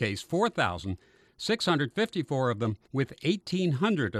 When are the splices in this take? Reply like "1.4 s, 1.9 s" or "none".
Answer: 2.8 s